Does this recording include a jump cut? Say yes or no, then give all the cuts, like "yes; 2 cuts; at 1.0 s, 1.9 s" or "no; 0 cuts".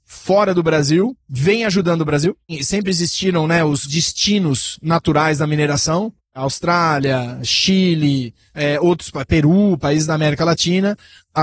no; 0 cuts